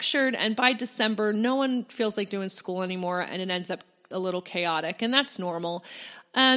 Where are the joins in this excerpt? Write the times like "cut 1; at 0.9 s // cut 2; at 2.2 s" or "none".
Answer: none